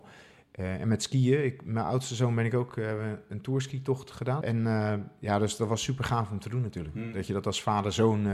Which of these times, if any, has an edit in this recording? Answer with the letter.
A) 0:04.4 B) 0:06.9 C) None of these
A